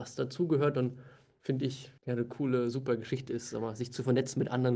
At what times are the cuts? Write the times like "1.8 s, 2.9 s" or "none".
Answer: 2.0 s